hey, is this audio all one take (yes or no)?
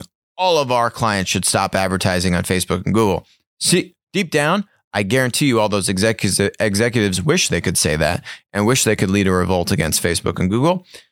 yes